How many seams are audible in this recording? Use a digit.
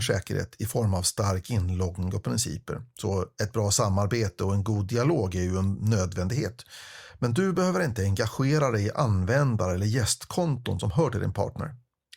0